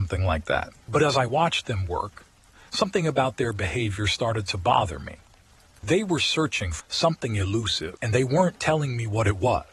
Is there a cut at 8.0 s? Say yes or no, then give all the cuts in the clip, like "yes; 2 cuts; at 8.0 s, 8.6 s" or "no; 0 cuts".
yes; 2 cuts; at 6.8 s, 8.0 s